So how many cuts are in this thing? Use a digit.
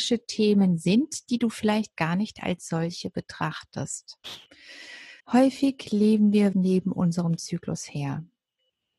2